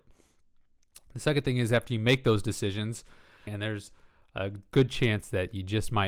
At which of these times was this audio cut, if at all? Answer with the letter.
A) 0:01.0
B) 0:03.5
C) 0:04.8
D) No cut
B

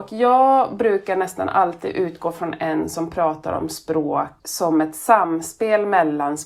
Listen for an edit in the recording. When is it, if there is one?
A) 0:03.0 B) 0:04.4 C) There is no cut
B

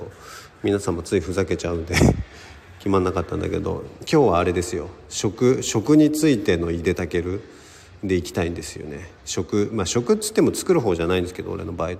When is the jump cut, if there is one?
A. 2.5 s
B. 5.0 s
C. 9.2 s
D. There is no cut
C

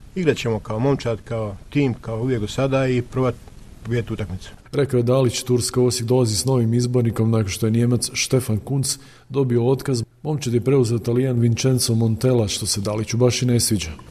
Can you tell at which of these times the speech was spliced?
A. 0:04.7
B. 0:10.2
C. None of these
C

